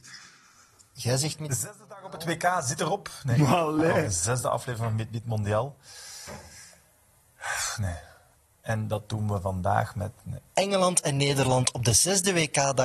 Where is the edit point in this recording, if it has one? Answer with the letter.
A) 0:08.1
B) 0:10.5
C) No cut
B